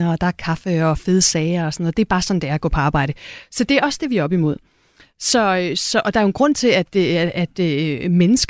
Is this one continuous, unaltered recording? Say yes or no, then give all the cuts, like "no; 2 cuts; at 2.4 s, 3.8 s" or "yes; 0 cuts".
yes; 0 cuts